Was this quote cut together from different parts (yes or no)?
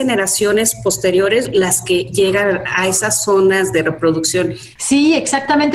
yes